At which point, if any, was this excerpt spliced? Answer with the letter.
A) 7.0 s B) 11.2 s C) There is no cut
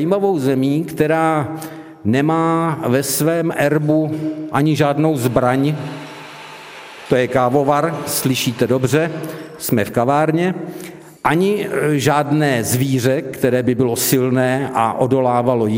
B